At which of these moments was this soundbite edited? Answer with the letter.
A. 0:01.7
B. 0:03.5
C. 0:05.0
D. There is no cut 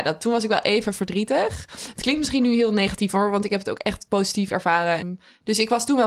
C